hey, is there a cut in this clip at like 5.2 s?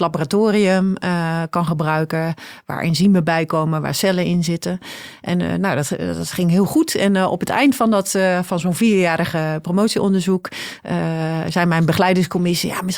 no; 0 cuts

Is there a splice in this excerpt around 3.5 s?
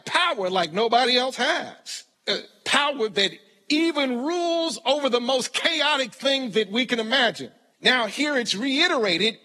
no; 2 cuts; at 2.1 s, 7.7 s

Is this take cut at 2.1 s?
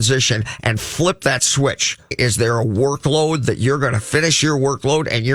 yes; 1 cut; at 2.1 s

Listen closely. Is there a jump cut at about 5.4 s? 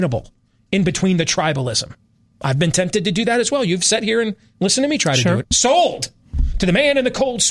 yes; 1 cut; at 5.4 s

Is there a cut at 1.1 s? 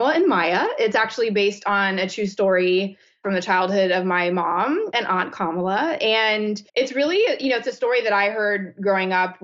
no; 2 cuts; at 4.9 s, 6.7 s

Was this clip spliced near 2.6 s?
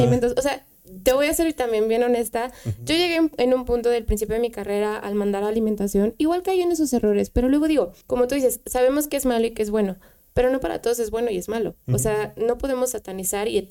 no; 1 cut; at 8.0 s

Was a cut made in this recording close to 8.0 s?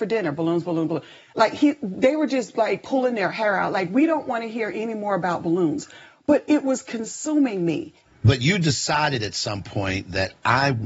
yes; 1 cut; at 8.0 s

